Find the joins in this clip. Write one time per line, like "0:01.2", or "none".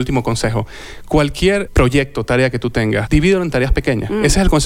0:01.7
0:03.1

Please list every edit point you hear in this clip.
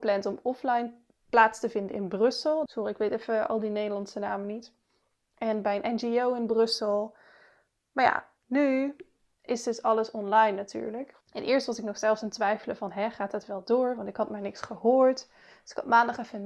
0:02.7
0:11.2

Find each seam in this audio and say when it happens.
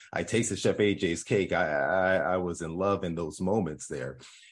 none

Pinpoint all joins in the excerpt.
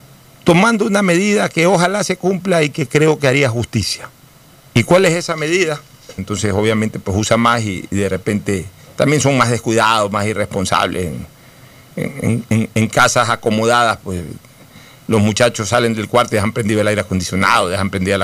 0:06.2

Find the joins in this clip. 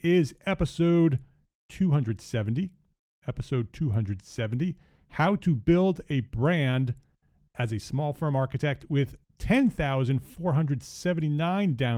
none

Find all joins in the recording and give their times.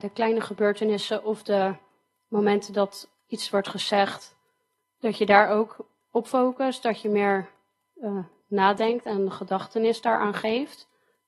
none

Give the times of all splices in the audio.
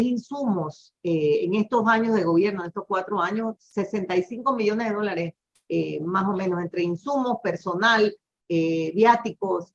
0:03.6

